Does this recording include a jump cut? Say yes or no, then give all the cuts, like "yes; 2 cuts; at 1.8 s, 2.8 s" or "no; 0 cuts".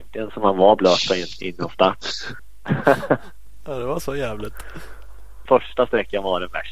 yes; 2 cuts; at 2.4 s, 5.5 s